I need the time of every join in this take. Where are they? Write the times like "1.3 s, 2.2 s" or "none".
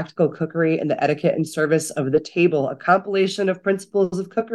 none